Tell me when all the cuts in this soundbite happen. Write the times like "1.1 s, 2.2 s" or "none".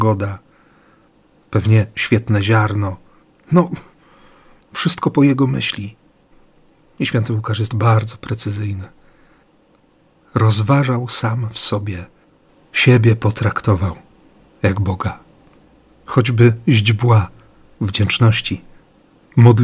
none